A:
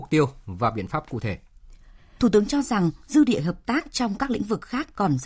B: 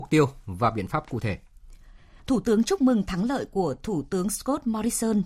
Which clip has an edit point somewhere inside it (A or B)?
A